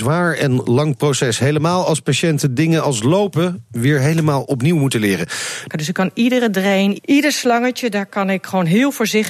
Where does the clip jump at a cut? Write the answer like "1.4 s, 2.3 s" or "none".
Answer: 5.7 s, 7.0 s